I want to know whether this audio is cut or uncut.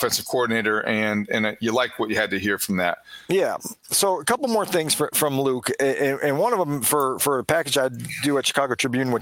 uncut